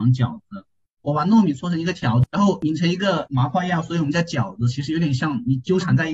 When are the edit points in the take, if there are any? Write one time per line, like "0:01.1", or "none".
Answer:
0:01.0